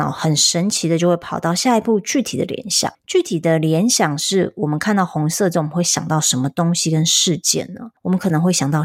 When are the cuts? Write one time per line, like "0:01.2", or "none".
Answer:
none

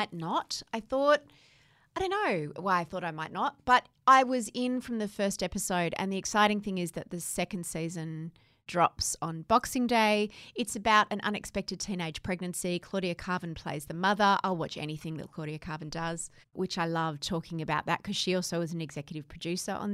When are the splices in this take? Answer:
0:16.4

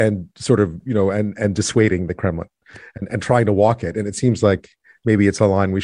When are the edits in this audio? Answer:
none

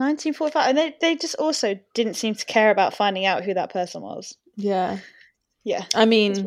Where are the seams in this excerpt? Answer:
0:04.5

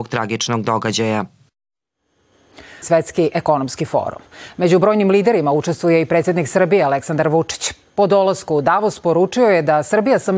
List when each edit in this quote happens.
0:02.8

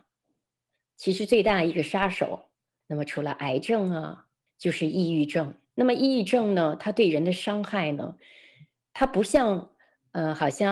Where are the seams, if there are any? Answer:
0:02.8
0:04.5

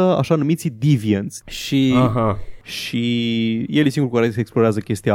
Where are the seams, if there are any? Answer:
0:01.4
0:02.6

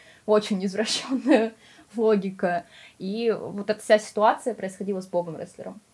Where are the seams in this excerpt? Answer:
none

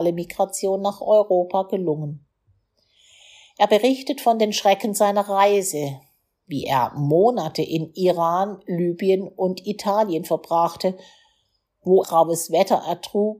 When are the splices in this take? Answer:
0:12.0

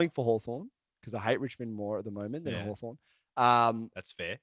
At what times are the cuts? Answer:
none

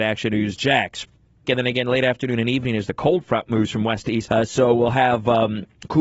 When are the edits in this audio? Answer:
0:01.4
0:04.3

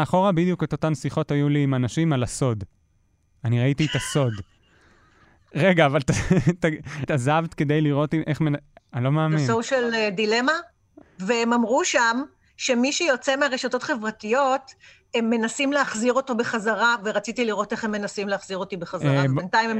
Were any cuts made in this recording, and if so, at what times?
0:07.1
0:08.8
0:11.0

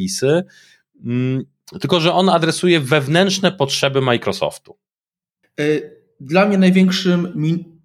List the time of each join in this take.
0:05.4

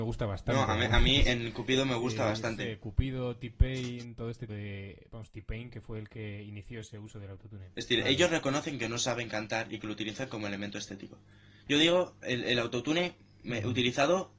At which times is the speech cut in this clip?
0:04.5

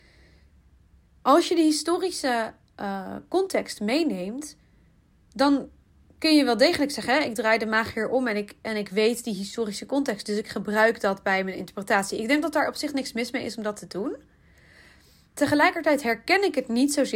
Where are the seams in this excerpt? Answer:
none

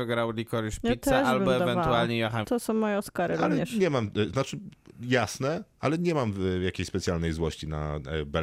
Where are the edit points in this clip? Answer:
0:02.4

